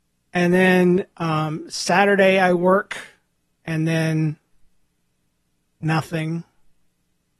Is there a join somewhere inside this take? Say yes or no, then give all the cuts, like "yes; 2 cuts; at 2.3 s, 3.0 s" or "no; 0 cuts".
no; 0 cuts